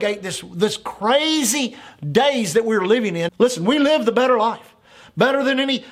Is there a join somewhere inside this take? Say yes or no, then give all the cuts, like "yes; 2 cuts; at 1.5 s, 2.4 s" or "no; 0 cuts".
yes; 1 cut; at 3.3 s